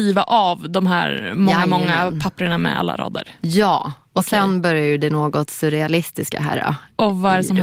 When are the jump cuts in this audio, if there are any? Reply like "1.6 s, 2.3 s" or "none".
none